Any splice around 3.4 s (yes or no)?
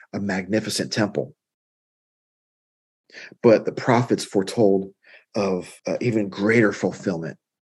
no